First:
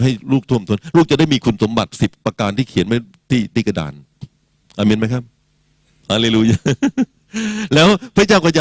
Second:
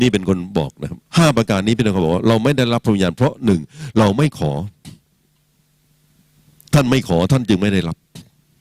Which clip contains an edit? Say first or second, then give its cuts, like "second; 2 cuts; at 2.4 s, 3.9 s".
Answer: second; 1 cut; at 1.1 s